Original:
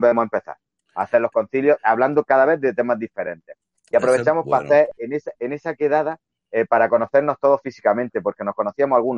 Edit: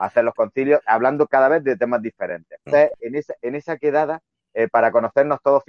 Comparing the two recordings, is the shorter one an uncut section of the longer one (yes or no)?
no